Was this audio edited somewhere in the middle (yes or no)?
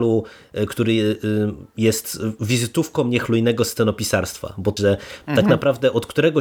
yes